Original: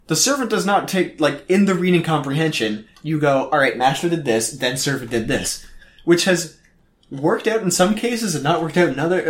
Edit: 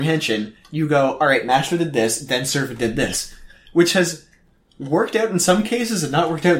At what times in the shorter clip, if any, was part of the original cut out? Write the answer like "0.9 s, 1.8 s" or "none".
none